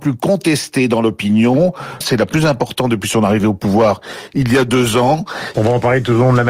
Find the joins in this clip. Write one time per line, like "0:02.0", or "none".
0:02.0
0:05.5